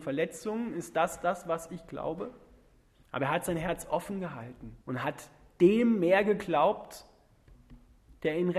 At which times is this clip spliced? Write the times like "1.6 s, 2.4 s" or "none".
3.0 s, 4.8 s